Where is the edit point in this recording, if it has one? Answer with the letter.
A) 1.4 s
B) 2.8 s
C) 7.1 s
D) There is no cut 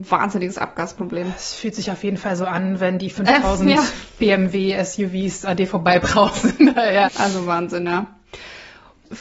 C